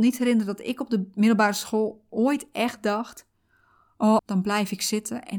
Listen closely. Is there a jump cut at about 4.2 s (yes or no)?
yes